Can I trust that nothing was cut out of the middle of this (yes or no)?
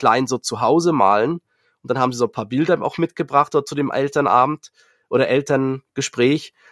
yes